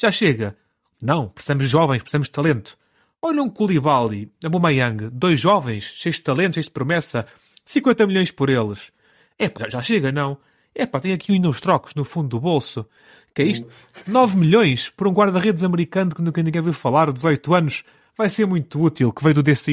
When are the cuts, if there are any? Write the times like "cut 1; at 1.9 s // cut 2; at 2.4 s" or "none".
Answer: cut 1; at 9.6 s // cut 2; at 13.6 s